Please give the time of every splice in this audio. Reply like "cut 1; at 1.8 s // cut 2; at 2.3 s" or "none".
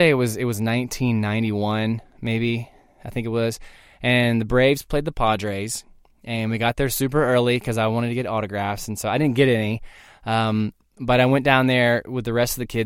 none